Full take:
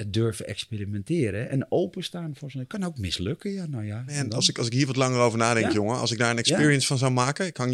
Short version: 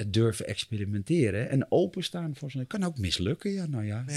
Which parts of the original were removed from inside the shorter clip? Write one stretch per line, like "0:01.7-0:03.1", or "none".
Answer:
none